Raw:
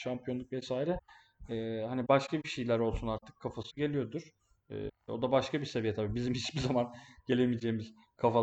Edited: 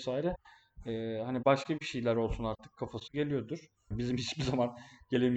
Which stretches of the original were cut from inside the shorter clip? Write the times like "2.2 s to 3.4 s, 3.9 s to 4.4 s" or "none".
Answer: 4.5 s to 6.1 s